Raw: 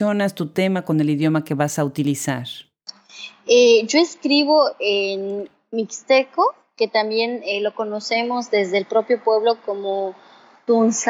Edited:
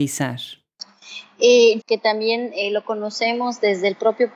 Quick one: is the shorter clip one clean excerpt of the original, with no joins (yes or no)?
no